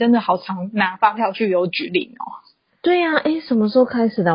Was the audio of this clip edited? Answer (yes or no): no